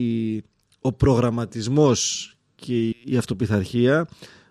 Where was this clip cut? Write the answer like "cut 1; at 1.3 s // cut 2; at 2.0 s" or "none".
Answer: cut 1; at 2.9 s